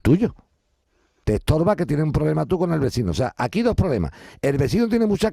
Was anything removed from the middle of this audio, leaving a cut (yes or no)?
yes